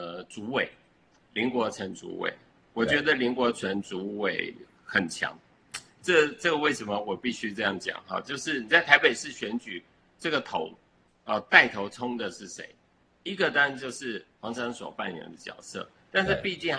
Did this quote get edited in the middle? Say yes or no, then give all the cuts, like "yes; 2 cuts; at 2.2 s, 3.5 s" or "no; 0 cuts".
yes; 1 cut; at 14.6 s